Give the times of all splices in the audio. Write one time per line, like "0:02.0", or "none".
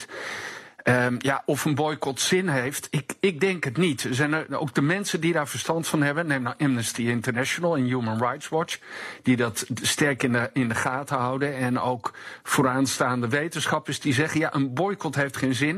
none